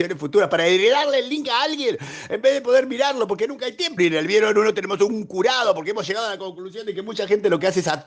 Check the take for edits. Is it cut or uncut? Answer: cut